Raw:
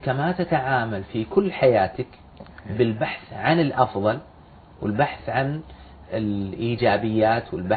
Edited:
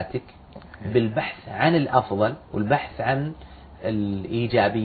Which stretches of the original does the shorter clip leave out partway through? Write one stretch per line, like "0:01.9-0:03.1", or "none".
0:04.3-0:04.7